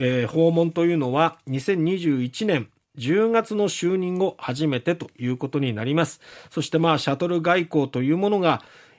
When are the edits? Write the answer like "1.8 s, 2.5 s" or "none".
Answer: none